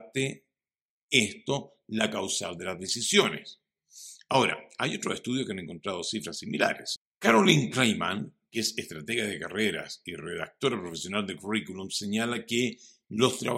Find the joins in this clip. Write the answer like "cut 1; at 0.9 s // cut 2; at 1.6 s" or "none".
cut 1; at 7.0 s